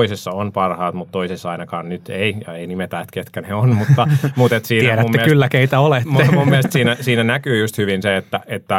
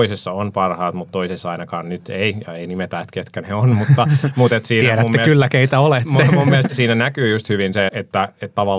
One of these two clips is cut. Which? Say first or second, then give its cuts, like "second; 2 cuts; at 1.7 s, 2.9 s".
second; 2 cuts; at 6.7 s, 7.9 s